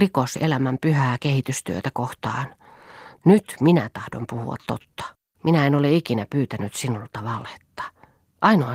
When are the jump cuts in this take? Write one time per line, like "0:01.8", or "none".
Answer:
0:03.2
0:05.3